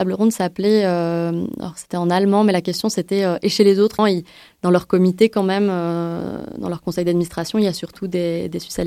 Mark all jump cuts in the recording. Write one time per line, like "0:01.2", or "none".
0:04.0